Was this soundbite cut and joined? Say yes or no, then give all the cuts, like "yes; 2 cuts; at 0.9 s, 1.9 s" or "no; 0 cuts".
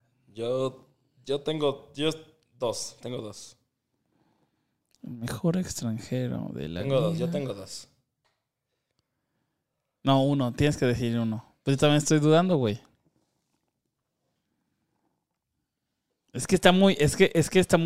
no; 0 cuts